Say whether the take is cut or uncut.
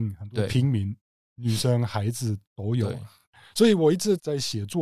uncut